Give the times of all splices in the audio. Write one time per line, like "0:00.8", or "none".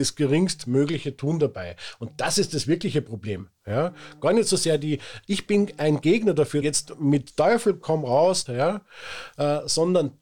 0:06.6
0:08.5